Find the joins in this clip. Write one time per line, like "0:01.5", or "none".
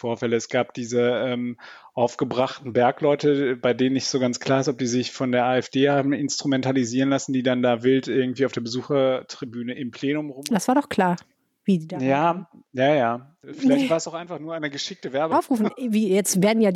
0:10.5
0:13.4
0:15.3